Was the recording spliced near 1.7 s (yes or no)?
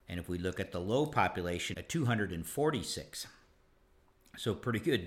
yes